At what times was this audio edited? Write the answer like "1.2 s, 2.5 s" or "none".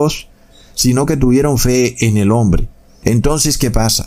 3.0 s